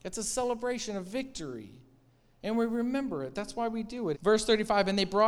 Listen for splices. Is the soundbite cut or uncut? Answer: cut